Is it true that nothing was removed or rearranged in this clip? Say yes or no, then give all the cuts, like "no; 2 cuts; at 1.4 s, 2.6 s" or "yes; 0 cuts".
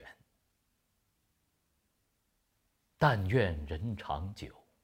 yes; 0 cuts